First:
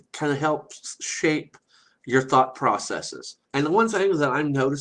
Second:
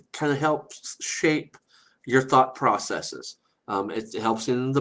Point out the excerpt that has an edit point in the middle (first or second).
first